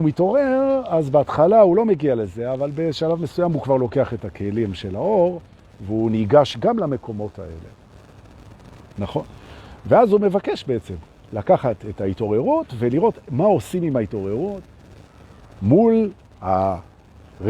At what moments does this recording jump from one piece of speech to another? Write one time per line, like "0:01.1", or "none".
none